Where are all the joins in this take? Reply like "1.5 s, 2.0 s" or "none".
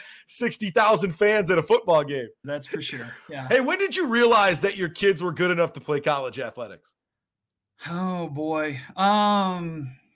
2.4 s